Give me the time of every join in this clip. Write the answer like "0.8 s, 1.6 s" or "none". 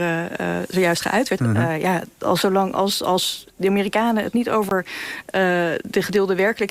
1.4 s